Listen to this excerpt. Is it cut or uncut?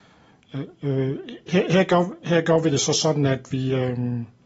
uncut